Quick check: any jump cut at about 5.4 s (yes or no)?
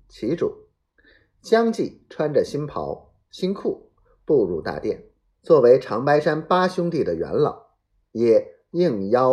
yes